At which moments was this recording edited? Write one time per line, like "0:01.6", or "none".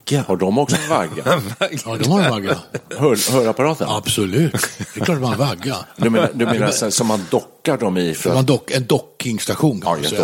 none